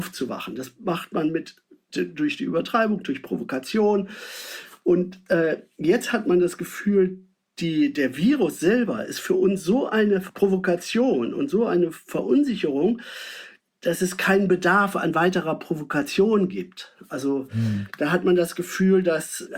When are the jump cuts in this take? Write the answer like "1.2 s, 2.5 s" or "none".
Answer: none